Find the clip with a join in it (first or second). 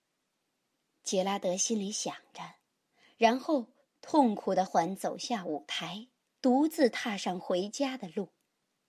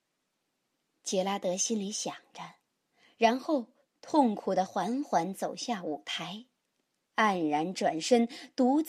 first